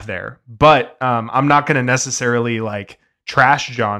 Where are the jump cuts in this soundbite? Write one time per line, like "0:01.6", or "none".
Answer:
none